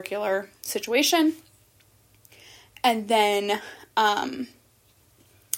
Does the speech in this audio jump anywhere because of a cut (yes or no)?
no